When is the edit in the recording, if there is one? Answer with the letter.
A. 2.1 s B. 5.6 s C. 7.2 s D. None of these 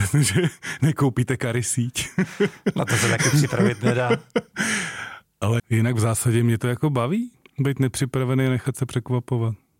B